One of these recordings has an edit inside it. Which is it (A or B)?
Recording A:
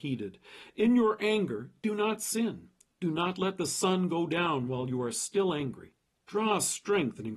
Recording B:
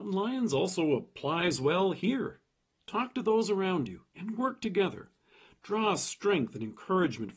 A